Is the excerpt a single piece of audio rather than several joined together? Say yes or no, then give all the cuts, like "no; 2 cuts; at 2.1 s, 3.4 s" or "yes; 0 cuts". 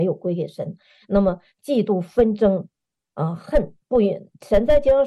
no; 1 cut; at 3.8 s